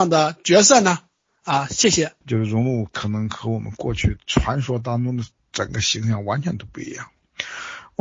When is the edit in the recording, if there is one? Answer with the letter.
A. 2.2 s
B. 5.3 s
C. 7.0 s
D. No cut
A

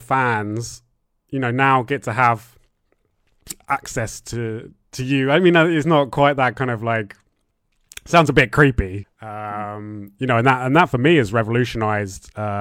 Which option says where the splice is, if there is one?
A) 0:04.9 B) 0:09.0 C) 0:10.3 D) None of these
B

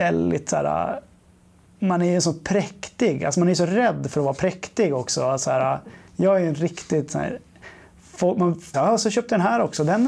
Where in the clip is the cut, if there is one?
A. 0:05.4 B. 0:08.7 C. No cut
B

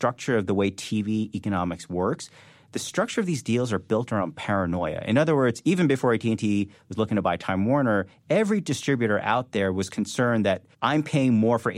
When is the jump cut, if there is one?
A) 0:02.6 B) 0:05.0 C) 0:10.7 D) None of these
C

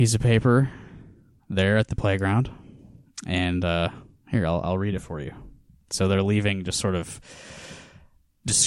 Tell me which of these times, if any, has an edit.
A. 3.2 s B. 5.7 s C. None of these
B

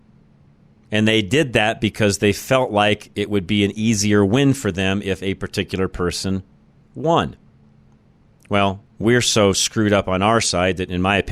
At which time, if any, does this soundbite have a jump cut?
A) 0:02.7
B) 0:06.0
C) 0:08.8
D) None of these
C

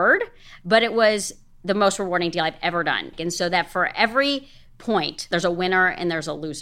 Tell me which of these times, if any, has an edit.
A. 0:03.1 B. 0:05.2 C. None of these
A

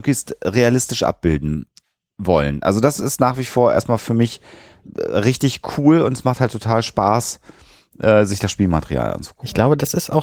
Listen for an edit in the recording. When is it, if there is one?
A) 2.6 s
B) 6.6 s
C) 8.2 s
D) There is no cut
D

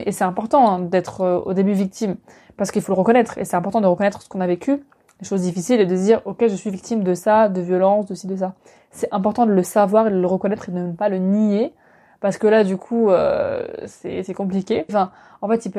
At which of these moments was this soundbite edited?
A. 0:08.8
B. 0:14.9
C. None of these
B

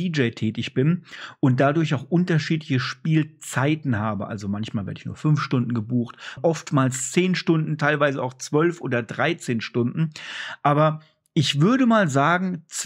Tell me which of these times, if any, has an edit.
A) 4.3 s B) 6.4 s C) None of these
B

